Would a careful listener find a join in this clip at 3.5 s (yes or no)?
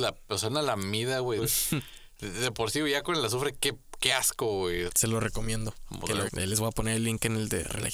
no